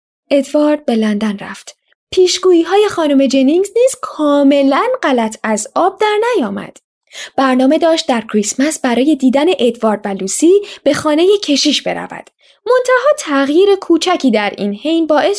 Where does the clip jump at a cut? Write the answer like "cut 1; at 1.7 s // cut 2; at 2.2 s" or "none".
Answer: cut 1; at 1.9 s